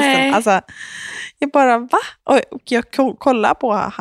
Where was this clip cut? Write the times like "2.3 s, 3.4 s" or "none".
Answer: none